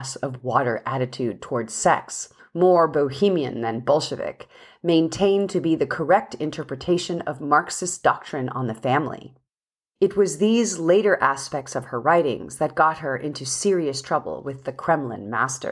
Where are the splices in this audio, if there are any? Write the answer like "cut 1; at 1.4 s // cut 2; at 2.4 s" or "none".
cut 1; at 2.4 s // cut 2; at 10.0 s